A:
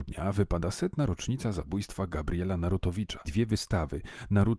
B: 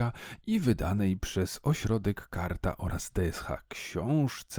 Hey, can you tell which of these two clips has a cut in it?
A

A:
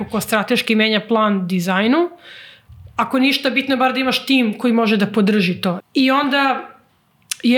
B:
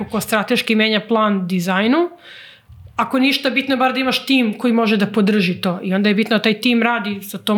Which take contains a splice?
A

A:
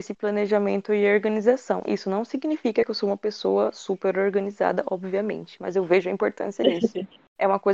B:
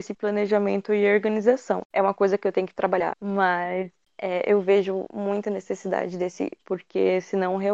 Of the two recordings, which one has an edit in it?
B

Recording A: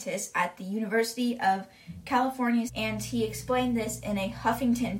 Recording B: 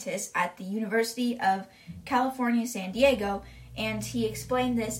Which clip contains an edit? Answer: A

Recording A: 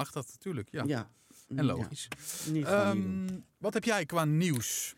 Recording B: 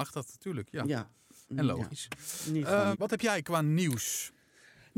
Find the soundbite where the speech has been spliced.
B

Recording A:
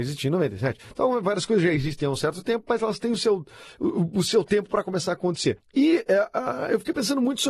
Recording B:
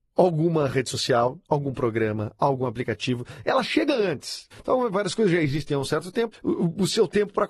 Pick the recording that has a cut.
B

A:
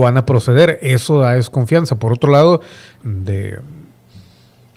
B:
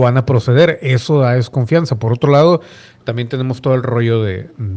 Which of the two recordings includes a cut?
A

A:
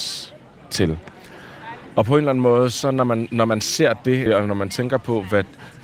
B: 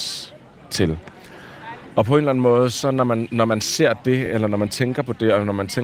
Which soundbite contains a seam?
A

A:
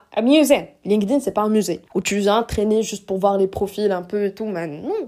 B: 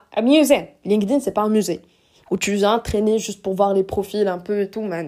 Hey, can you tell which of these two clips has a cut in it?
A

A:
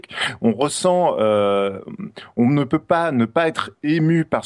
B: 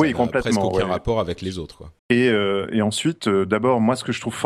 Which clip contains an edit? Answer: B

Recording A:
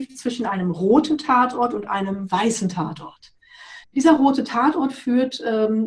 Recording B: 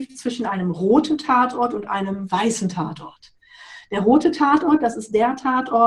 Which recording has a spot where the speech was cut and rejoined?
A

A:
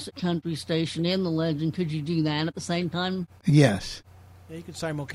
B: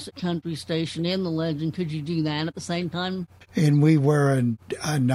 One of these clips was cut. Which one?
B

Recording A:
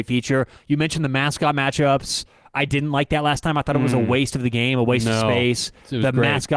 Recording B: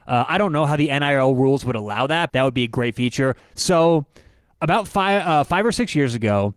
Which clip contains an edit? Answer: B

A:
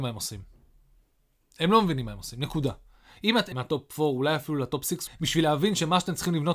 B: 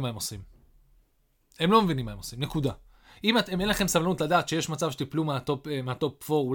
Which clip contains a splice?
A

